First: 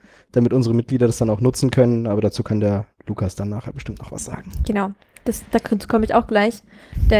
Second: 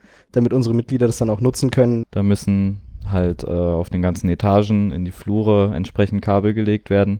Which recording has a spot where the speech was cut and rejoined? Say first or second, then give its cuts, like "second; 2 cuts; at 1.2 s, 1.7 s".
second; 1 cut; at 2.0 s